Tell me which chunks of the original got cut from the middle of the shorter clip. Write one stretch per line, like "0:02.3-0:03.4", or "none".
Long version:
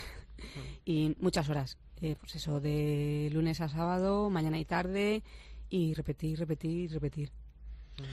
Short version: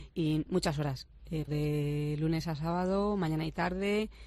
0:02.2-0:02.6